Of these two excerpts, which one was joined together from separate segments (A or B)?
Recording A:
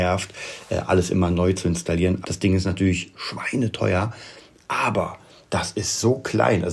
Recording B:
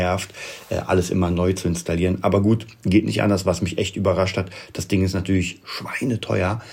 A